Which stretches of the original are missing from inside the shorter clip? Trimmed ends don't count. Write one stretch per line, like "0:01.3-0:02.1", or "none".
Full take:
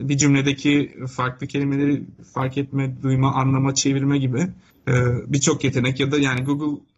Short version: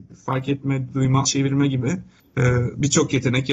0:03.3-0:03.7

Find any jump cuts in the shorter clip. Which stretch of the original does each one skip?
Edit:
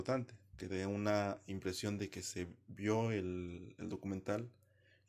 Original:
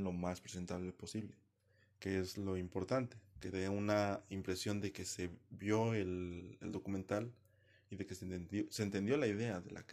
none

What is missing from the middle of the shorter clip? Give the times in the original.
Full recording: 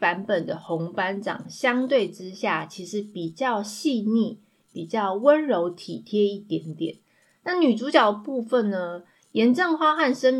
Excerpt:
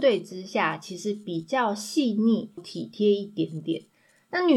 0:04.5-0:05.7

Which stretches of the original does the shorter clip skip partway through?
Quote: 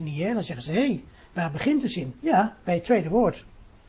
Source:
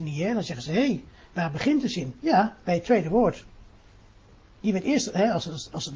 none

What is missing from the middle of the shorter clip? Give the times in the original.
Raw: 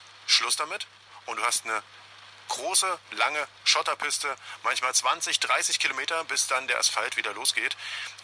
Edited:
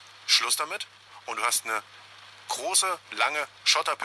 none

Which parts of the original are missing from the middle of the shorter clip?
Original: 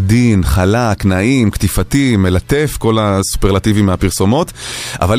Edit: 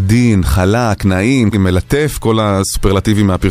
0:01.5-0:02.1

